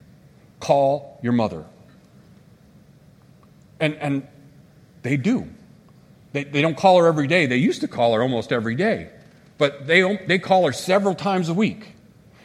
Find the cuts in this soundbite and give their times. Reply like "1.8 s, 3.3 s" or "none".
none